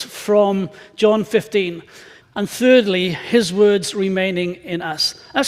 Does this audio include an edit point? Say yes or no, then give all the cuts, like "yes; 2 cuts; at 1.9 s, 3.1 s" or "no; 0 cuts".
yes; 1 cut; at 2.2 s